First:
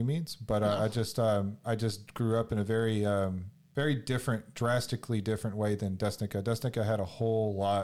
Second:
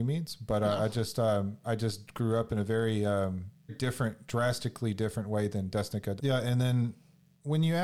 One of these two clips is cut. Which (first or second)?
second